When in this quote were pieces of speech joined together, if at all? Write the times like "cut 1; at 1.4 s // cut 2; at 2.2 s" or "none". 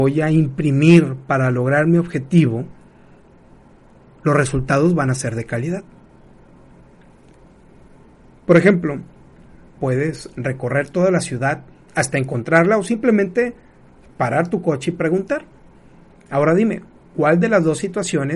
cut 1; at 9.8 s